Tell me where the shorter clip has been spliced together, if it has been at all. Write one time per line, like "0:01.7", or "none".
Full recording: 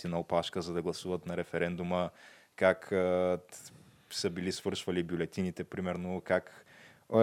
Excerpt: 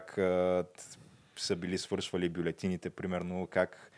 none

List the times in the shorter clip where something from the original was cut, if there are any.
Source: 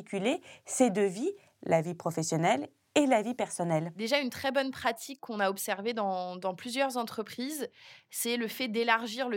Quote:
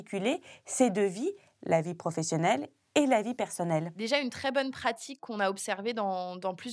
none

